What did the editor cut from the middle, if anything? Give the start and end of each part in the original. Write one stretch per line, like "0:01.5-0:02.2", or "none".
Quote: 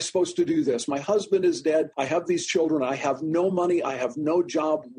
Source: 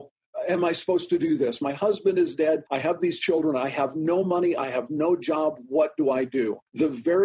none

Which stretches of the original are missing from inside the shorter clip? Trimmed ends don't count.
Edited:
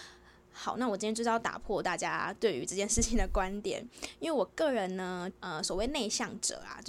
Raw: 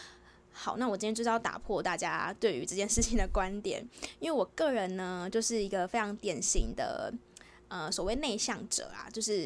0:05.3-0:07.6

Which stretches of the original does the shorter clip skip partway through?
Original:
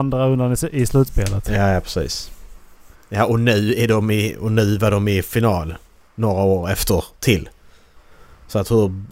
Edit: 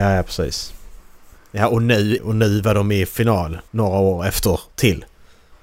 0:03.8-0:04.3
0:05.8-0:06.1

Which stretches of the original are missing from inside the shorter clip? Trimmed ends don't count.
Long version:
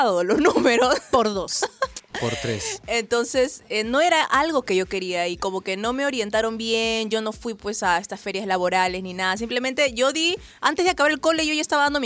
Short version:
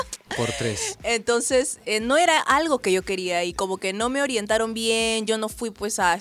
none

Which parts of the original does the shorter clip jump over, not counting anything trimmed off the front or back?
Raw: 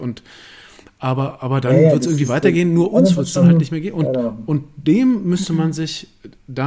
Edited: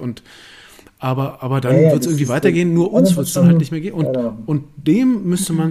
none

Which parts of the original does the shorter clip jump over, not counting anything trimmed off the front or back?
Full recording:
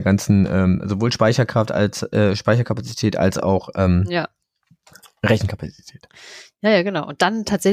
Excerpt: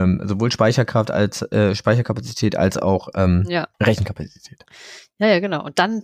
0:04.3-0:05.2

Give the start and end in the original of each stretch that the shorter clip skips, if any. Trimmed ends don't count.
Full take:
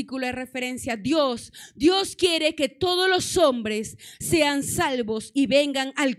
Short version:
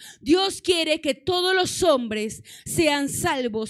none

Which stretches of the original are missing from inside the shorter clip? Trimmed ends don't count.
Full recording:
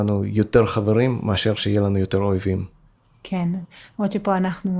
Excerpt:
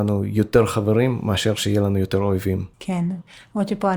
0:02.7-0:03.2

